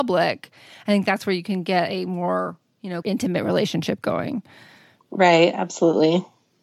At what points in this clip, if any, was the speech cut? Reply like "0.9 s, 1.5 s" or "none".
3.0 s